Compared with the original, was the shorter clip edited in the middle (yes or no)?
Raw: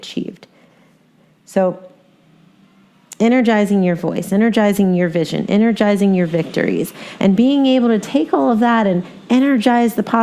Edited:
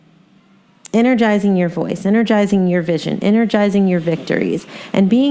no